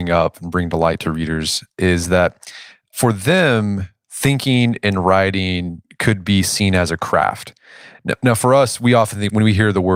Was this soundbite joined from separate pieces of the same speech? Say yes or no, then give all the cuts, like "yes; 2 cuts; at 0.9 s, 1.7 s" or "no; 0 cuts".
no; 0 cuts